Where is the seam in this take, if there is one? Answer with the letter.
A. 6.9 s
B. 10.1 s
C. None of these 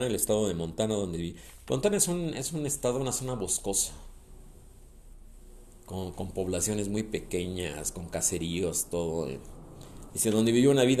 B